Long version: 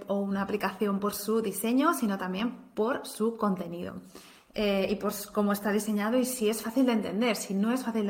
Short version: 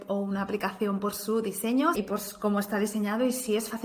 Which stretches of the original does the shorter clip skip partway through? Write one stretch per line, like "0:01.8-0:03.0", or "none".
0:01.9-0:04.9